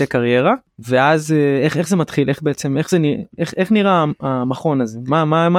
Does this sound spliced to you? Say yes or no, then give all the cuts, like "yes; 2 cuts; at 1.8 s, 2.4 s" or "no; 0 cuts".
no; 0 cuts